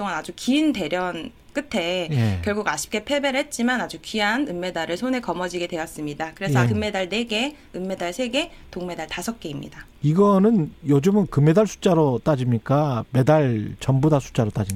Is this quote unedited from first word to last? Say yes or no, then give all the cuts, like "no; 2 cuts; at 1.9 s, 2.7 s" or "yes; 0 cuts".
no; 1 cut; at 6.7 s